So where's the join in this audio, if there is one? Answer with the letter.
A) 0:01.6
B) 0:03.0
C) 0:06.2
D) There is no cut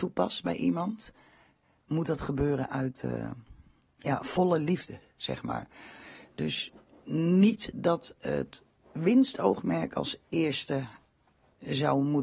D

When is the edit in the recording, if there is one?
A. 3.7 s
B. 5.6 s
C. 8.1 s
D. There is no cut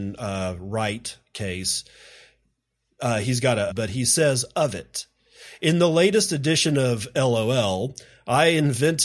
A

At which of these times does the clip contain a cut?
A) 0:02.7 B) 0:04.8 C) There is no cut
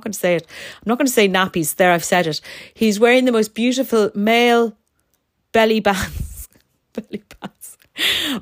C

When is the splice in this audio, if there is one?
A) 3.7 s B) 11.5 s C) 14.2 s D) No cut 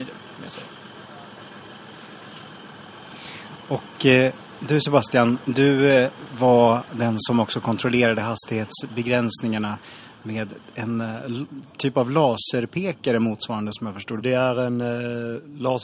C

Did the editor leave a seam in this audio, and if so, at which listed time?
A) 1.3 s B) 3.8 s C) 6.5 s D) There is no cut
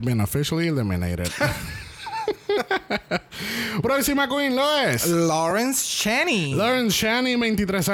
B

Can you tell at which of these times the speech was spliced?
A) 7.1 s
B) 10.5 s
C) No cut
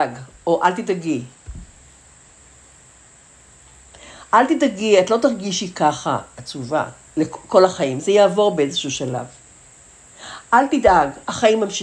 A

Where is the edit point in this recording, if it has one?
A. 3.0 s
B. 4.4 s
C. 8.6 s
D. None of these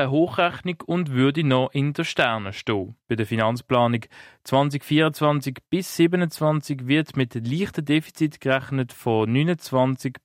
A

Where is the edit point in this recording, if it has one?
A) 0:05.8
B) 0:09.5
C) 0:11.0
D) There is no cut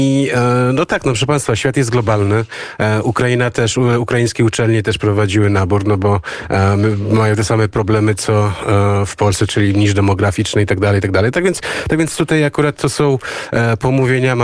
B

